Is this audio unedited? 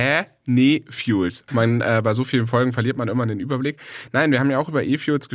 no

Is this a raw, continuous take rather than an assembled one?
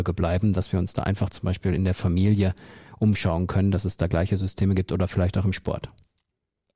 yes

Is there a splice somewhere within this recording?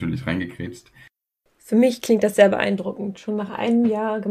no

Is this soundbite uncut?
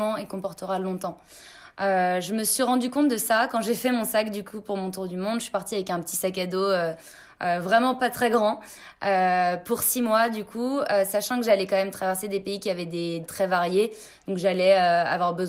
no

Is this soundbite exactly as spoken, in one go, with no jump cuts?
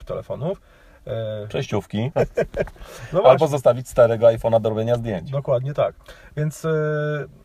no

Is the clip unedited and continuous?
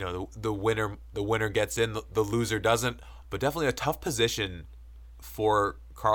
no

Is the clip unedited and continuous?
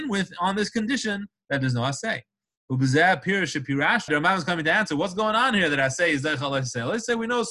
no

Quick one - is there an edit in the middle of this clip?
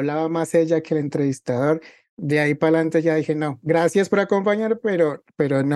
no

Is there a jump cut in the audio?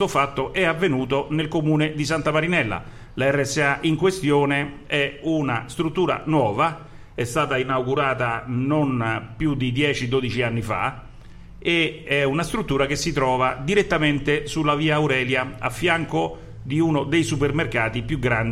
no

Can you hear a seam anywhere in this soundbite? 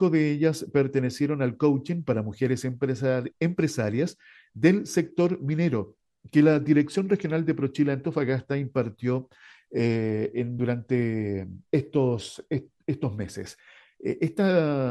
no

